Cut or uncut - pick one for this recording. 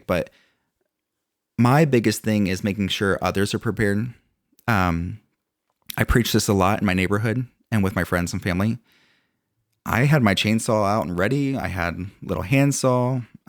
cut